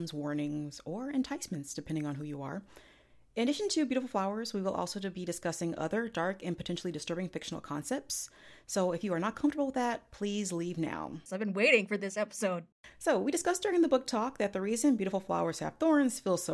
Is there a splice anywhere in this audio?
yes; 1 cut; at 11.3 s

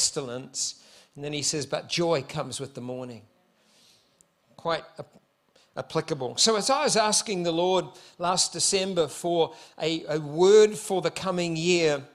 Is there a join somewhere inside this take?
no; 0 cuts

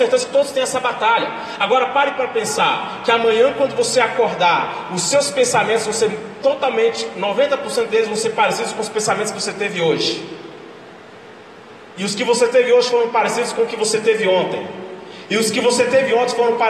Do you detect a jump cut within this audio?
no; 0 cuts

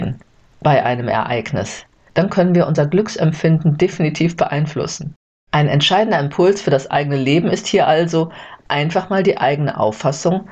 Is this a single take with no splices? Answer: no; 1 cut; at 5.3 s

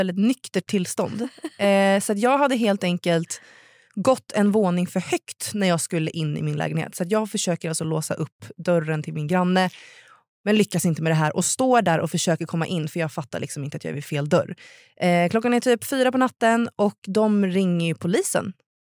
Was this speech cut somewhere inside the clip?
no; 0 cuts

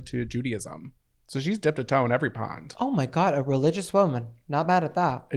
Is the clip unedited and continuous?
yes; 0 cuts

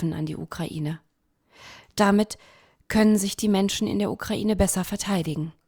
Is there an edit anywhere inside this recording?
no; 0 cuts

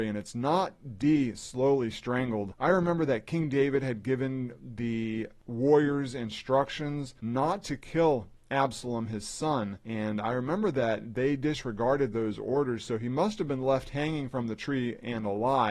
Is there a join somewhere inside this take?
no; 0 cuts

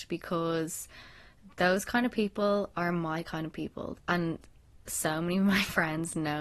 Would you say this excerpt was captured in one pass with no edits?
no; 1 cut; at 3.9 s

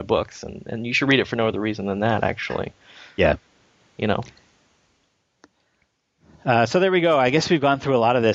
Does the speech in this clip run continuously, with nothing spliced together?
yes; 0 cuts

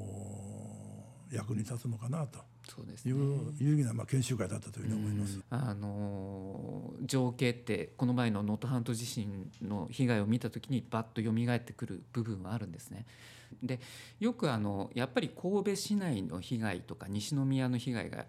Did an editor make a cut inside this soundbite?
yes; 2 cuts; at 5.4 s, 13.5 s

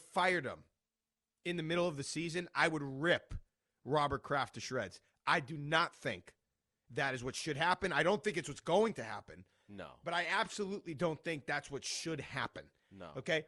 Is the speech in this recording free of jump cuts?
yes; 0 cuts

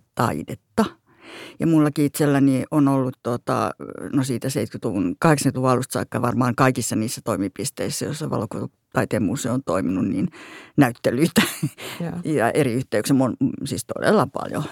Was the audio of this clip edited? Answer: no; 0 cuts

